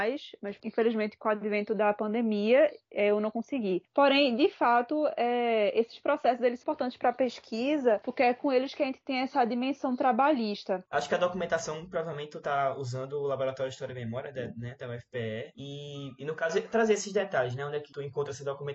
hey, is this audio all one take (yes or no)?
no